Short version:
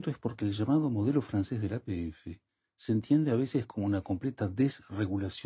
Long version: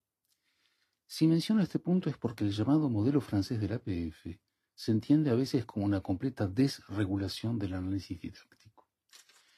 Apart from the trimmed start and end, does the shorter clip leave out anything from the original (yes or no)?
no